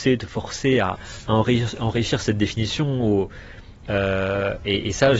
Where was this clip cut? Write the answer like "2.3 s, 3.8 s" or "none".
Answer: 3.9 s